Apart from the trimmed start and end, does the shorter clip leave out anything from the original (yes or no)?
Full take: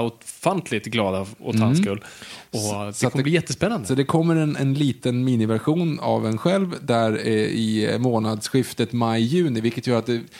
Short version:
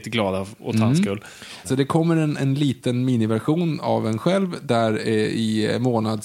yes